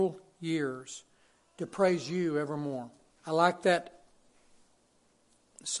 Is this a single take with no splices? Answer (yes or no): no